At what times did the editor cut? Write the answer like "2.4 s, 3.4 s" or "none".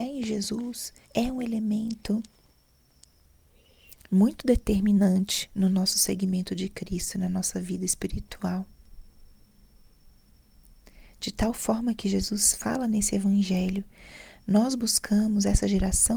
1.0 s